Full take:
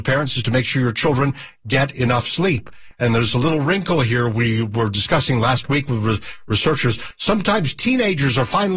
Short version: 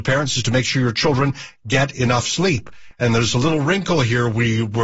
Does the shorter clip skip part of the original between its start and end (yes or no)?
no